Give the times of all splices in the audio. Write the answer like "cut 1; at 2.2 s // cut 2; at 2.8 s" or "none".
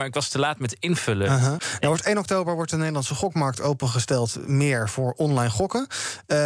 cut 1; at 1.6 s